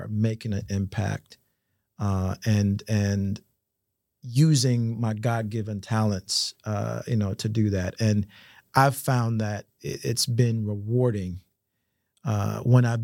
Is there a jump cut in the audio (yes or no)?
no